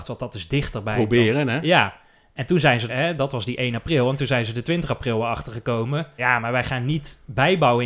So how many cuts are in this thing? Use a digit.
2